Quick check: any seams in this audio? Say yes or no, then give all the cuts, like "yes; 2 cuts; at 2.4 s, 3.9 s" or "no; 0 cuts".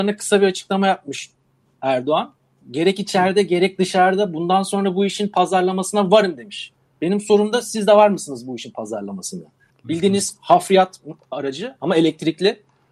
yes; 2 cuts; at 2.6 s, 9.7 s